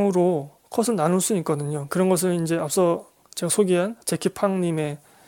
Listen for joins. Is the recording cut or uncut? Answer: cut